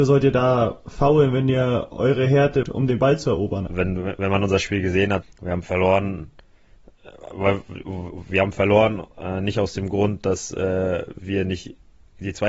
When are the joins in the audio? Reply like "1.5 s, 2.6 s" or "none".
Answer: 2.6 s, 3.7 s, 5.2 s